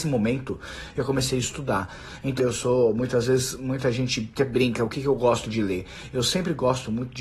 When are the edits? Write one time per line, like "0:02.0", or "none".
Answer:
0:02.4